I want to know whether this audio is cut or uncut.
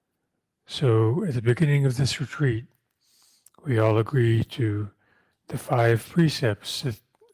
uncut